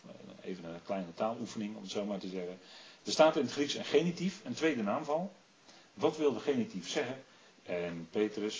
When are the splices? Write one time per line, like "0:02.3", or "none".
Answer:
0:07.5

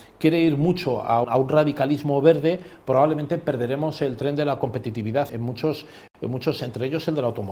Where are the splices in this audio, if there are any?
0:01.2
0:05.3
0:06.6

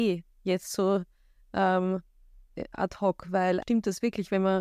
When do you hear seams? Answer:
0:03.6

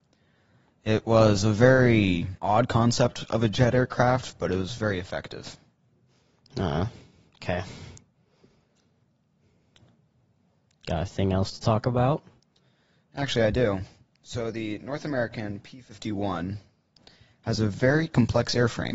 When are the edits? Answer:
0:02.4

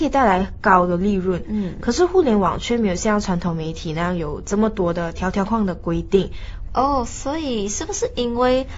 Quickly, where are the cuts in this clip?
0:05.5
0:06.7

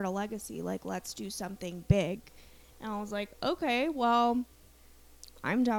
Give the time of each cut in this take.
none

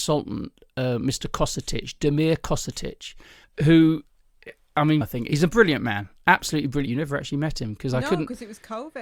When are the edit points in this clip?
0:03.4
0:05.0
0:06.9

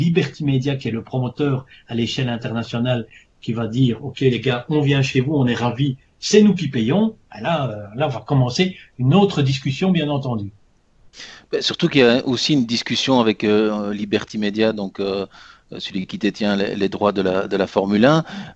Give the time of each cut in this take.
none

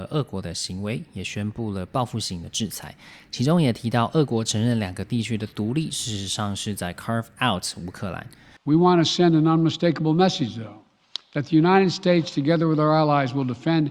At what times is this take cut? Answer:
0:08.6

